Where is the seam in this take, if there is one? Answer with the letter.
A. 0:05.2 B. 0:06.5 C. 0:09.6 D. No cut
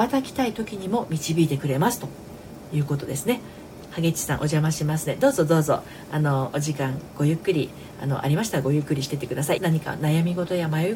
C